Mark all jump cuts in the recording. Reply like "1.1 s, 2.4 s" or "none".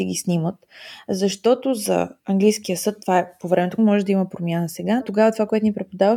2.2 s, 3.8 s, 5.0 s